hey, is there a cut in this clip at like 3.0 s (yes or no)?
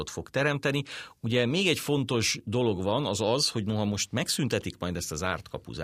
no